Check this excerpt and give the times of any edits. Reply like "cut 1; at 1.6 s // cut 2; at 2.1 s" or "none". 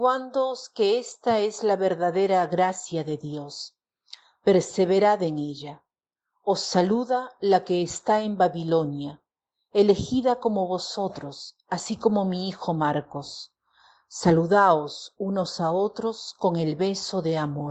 none